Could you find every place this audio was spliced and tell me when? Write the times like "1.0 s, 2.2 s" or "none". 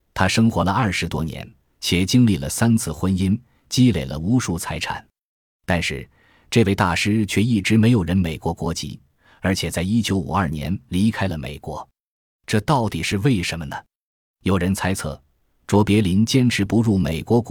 none